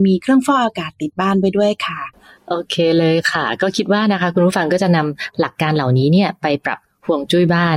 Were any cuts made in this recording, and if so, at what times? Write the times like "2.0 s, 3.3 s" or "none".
none